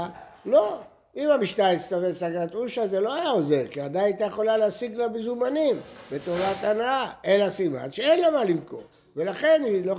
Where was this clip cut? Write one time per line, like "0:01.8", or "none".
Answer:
none

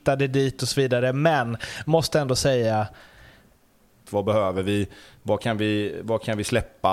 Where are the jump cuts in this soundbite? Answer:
0:04.1

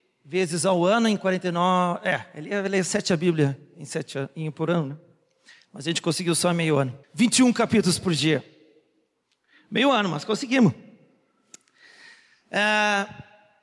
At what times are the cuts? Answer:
0:07.0

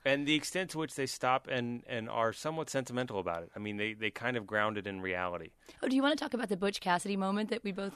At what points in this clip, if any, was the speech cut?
none

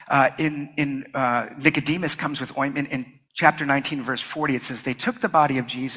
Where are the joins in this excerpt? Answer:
none

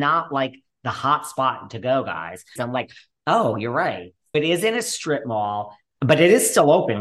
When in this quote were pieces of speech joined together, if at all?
0:02.6
0:04.3
0:05.9

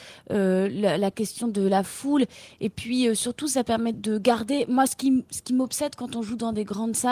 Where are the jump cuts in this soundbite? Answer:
0:03.9

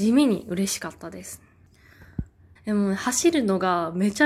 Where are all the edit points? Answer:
0:02.6

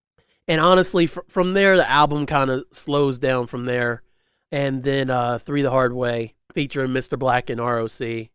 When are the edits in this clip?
0:04.4
0:06.4

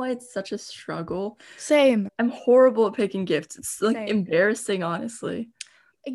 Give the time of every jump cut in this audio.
0:02.1

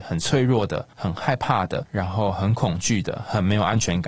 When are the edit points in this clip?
none

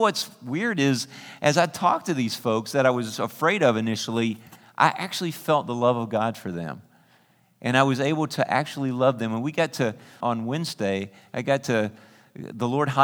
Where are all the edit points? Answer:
0:10.2

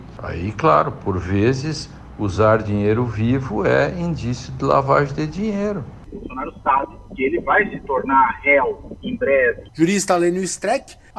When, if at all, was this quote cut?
0:06.1
0:09.7

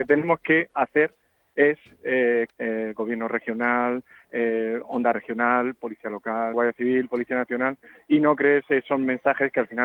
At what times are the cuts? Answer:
0:02.5
0:06.5

